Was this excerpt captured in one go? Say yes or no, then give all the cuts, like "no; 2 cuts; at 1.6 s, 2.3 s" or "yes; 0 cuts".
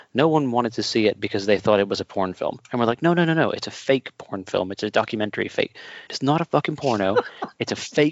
no; 1 cut; at 6.1 s